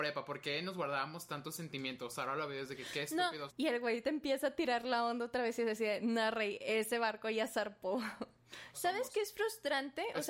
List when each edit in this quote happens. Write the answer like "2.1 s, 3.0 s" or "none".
3.5 s, 8.7 s